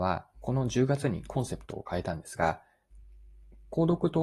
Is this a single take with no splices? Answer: yes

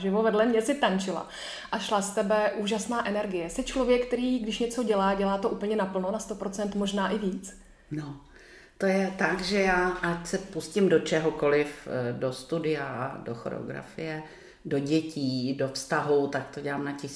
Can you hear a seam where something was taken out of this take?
no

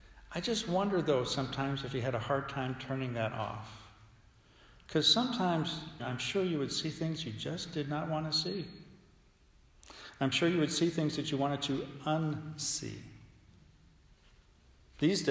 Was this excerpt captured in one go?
no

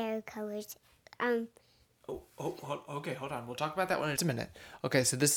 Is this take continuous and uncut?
no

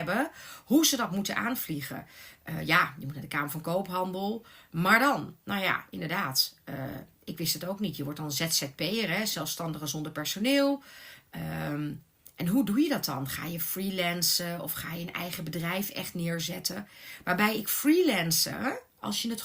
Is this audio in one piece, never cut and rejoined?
yes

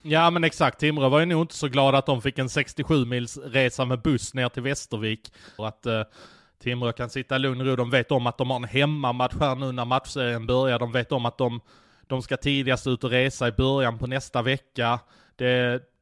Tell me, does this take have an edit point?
yes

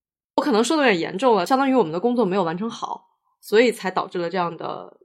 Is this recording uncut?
yes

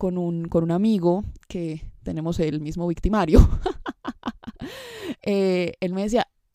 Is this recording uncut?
yes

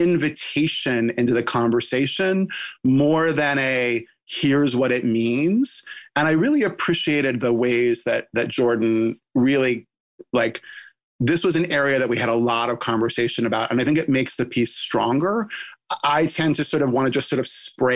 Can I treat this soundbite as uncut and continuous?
yes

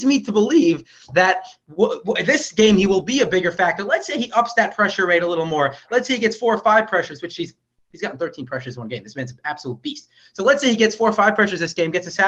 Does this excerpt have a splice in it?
no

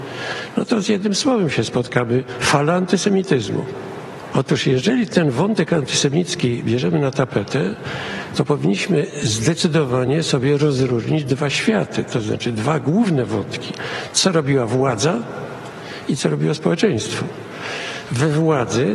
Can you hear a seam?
no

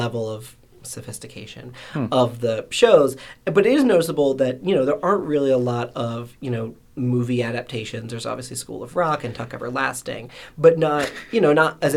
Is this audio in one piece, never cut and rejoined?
yes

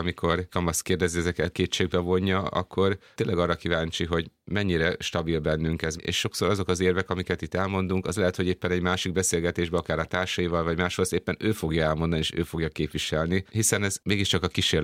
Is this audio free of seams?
no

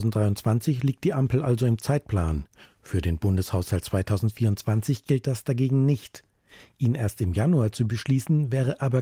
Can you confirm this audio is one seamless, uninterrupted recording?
yes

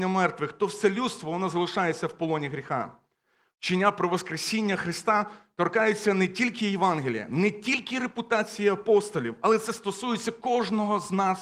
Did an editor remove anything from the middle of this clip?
no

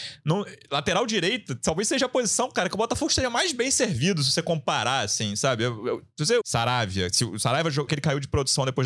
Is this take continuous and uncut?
no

